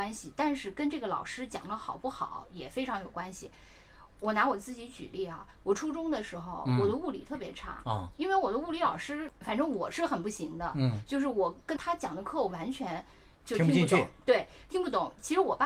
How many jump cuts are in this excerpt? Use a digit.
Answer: 1